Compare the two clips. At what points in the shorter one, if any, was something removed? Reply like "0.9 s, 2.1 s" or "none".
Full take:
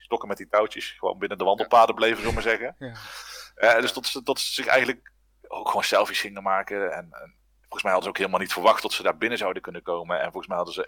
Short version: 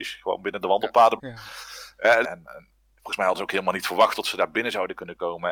1.2 s, 2.2 s